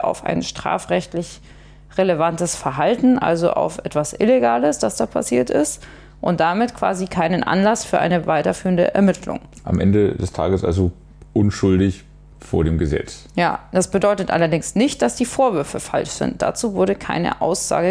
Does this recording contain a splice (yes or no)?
no